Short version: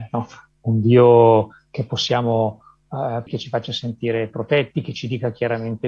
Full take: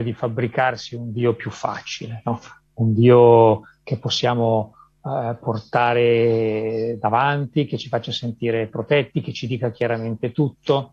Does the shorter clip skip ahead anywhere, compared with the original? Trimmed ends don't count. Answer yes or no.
yes